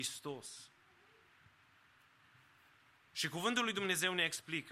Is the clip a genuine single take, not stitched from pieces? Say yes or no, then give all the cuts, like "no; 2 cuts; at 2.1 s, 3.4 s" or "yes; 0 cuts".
yes; 0 cuts